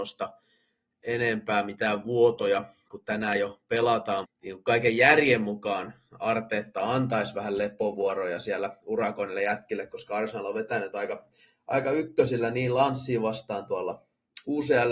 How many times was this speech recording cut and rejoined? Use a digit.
1